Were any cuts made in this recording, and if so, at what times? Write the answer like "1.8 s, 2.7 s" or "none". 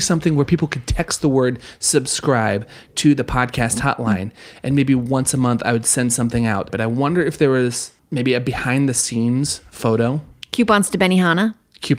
6.7 s